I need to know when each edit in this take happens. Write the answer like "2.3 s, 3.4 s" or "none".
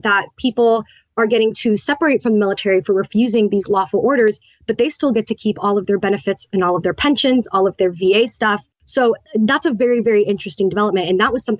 none